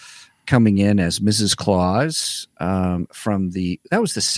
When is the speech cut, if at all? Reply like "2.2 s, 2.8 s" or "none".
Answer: none